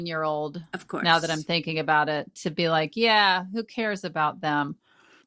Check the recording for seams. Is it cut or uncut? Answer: uncut